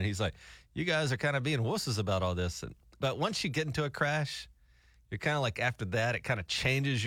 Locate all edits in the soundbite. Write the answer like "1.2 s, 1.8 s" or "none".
none